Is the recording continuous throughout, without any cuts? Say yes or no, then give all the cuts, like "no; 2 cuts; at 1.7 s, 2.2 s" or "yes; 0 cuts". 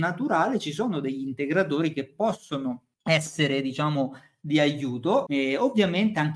no; 2 cuts; at 2.9 s, 5.3 s